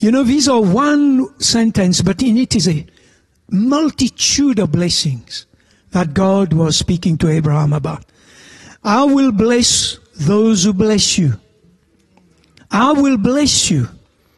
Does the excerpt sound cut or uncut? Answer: cut